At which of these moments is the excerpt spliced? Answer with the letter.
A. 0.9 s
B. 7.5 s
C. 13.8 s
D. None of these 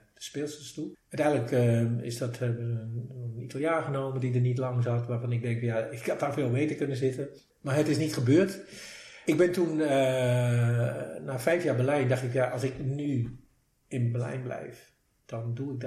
A